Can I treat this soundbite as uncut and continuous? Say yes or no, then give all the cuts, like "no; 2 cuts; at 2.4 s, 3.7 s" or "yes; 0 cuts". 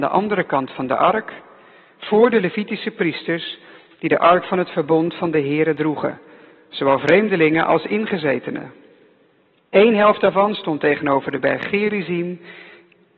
yes; 0 cuts